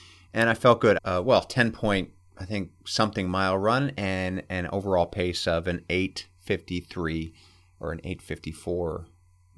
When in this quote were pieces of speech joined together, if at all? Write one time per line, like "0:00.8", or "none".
0:01.0